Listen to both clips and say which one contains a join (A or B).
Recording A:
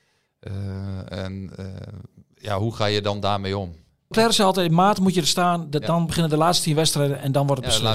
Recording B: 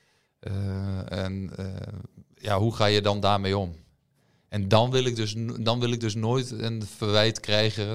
A